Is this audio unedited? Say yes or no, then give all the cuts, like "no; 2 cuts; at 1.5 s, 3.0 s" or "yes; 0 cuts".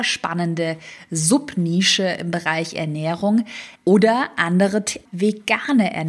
no; 2 cuts; at 3.8 s, 5.0 s